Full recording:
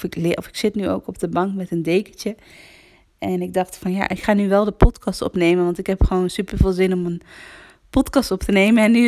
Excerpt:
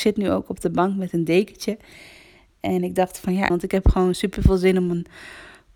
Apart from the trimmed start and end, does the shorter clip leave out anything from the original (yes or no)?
yes